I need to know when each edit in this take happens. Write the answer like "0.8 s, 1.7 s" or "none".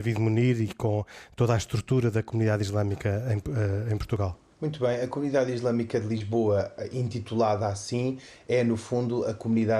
4.5 s